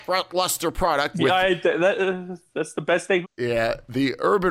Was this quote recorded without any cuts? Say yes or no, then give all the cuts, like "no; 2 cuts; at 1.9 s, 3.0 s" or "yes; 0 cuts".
no; 2 cuts; at 1.1 s, 3.2 s